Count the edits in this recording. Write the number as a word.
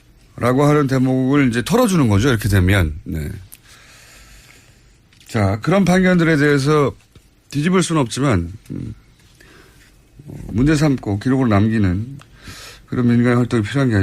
one